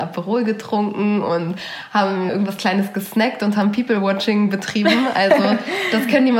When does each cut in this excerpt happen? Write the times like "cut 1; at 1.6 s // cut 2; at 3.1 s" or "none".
cut 1; at 2.3 s